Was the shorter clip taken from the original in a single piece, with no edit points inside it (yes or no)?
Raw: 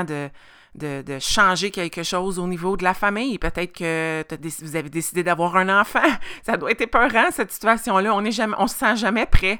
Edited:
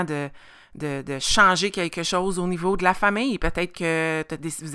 yes